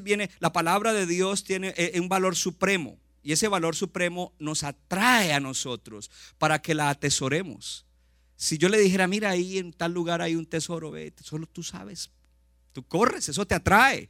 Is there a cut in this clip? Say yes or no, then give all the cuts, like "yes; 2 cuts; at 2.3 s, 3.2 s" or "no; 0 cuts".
no; 0 cuts